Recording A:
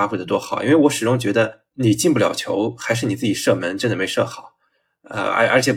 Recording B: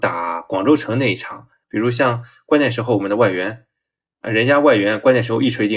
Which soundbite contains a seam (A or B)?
B